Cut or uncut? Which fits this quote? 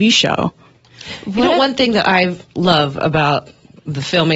uncut